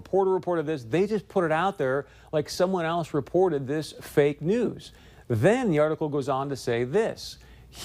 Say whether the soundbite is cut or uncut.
uncut